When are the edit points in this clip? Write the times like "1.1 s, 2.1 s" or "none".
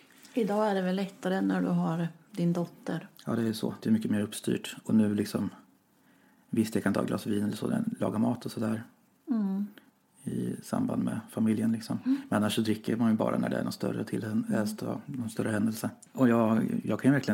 16.1 s